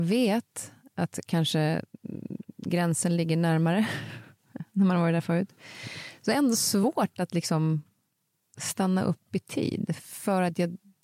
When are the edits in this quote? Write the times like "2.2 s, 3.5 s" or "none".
none